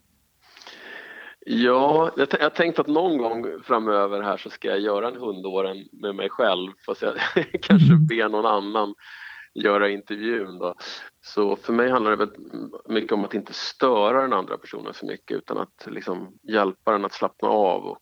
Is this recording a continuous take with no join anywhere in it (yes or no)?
no